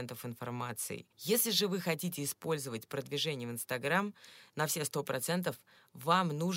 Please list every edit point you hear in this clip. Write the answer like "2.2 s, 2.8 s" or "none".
1.1 s, 4.5 s